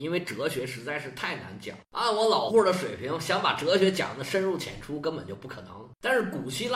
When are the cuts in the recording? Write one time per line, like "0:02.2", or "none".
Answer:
0:02.5